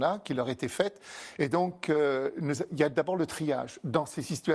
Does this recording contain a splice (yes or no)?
no